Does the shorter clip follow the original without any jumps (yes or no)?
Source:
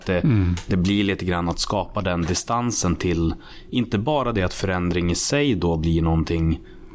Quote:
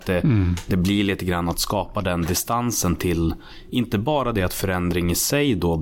yes